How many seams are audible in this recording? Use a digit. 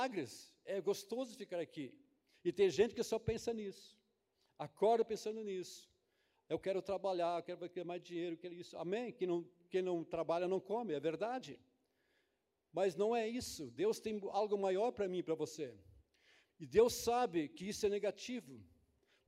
1